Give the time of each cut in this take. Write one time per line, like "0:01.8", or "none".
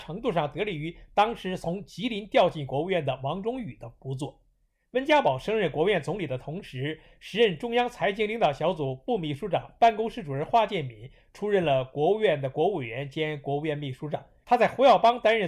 0:14.4

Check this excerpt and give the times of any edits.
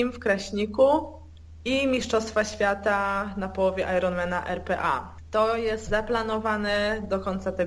0:05.9

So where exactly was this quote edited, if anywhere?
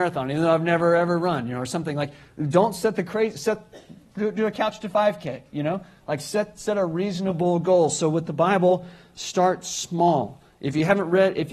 none

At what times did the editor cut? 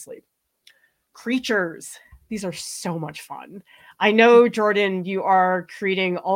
none

